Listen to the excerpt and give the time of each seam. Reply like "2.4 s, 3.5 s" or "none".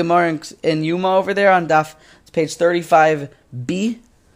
none